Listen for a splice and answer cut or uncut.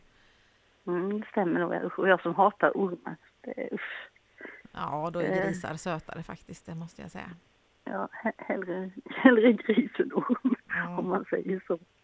uncut